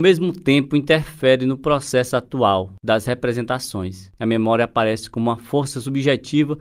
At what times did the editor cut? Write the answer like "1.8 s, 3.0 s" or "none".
4.2 s